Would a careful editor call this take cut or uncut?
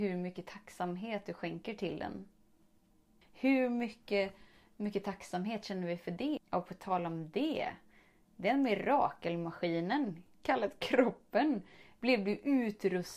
cut